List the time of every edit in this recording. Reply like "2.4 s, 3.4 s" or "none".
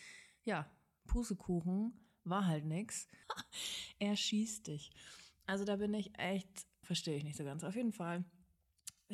3.2 s, 6.8 s